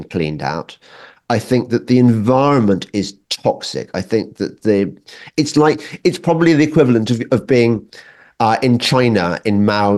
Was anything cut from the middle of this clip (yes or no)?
no